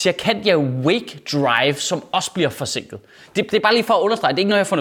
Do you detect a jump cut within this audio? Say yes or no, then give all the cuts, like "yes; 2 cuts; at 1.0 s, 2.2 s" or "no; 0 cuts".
no; 0 cuts